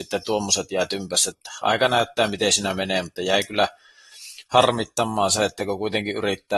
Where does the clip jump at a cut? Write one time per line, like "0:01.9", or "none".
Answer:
0:01.3